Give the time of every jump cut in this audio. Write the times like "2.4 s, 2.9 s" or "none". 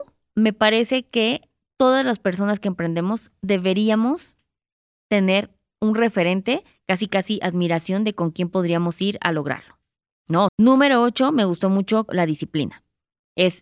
10.5 s, 12.1 s